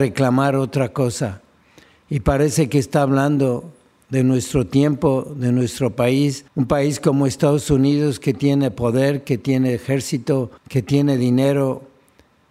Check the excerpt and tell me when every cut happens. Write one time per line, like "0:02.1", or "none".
0:06.5
0:10.6